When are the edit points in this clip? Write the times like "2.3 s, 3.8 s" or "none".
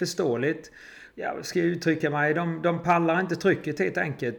1.1 s